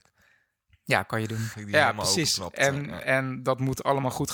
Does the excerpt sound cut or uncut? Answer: cut